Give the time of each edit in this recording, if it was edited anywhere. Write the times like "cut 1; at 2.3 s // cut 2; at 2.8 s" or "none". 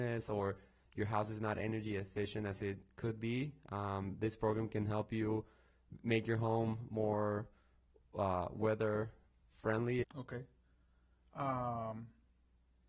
cut 1; at 10.0 s